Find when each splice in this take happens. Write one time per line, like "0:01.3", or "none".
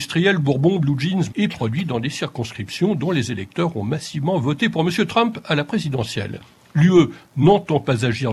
0:01.3